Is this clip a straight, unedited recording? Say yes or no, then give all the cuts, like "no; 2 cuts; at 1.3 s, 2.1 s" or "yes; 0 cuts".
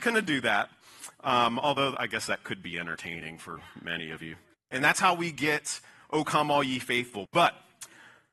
no; 2 cuts; at 4.5 s, 7.3 s